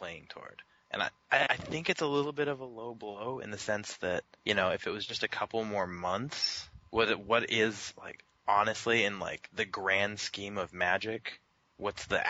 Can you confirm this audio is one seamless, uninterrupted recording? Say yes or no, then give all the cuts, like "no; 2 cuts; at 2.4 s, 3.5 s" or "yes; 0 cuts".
yes; 0 cuts